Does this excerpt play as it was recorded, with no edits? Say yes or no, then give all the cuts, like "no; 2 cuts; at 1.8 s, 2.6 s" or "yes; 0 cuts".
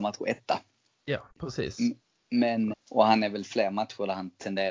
no; 2 cuts; at 1.3 s, 2.7 s